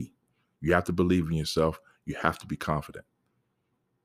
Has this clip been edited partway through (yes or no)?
no